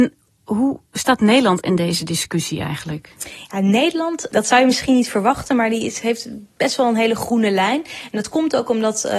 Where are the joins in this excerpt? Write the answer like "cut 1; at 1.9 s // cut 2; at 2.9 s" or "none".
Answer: none